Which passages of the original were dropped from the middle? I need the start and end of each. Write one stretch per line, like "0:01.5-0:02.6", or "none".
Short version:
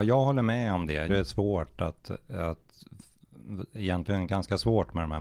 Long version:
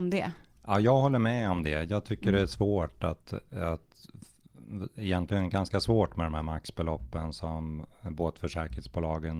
0:01.9-0:02.3